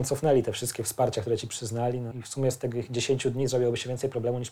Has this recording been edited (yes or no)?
yes